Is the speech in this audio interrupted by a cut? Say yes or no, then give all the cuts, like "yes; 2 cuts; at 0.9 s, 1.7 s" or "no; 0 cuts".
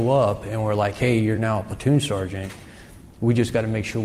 no; 0 cuts